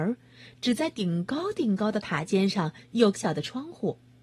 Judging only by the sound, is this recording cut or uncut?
cut